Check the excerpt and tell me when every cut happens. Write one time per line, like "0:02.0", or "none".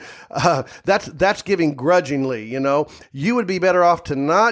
0:03.0